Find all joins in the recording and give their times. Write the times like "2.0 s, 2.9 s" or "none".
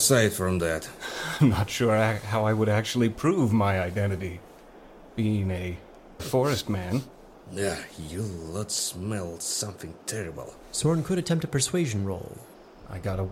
6.2 s